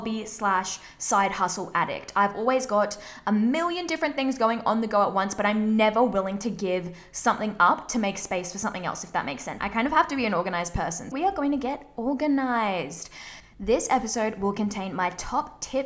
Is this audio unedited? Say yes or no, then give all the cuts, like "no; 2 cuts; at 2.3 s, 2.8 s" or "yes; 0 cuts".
no; 2 cuts; at 9.6 s, 11.1 s